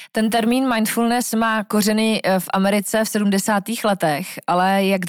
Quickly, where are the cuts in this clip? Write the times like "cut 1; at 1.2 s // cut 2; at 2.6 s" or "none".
none